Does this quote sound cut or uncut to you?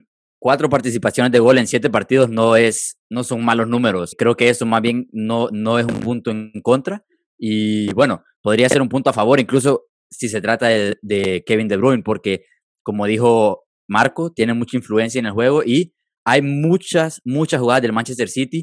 uncut